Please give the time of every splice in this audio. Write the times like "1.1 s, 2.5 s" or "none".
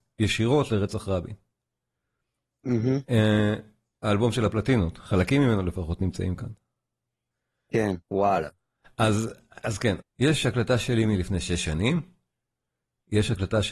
8.0 s, 10.0 s